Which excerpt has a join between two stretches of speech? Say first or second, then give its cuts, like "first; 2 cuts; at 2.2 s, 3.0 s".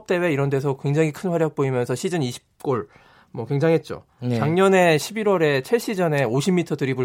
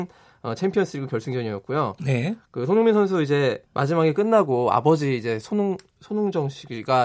second; 1 cut; at 3.7 s